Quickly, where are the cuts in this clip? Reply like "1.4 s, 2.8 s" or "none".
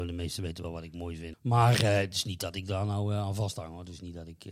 1.3 s